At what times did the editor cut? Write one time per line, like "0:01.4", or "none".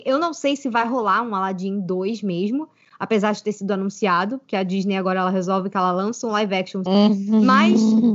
0:06.9